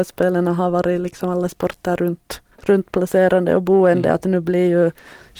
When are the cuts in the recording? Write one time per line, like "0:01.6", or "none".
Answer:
0:02.5